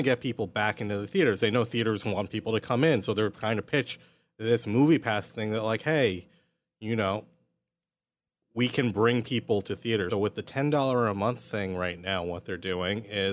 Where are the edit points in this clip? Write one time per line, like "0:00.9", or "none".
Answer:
0:10.1